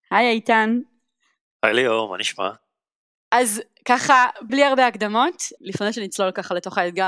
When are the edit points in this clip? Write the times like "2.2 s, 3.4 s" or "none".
4.5 s, 5.6 s